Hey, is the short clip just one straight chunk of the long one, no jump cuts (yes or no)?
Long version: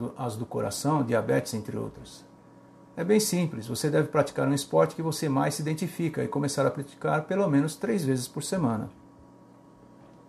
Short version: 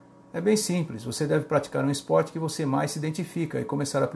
yes